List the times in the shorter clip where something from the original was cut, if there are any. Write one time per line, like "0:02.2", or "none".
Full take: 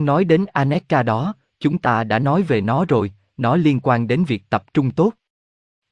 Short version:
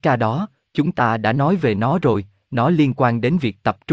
none